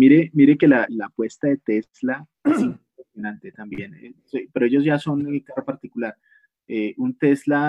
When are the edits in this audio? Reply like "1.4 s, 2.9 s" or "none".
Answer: 2.3 s